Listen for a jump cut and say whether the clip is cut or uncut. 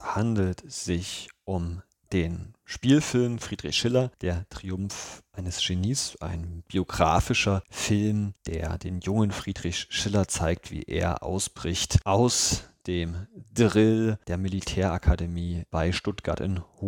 uncut